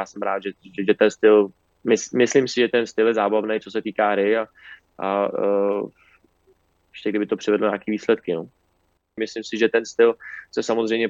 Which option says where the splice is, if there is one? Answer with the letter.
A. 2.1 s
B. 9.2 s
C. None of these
B